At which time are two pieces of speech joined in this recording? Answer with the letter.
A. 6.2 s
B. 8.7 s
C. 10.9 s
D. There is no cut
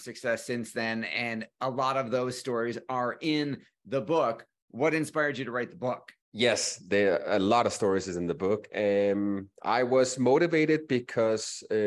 A